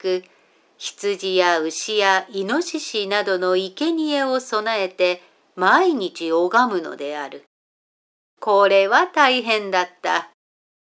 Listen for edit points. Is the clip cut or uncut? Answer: uncut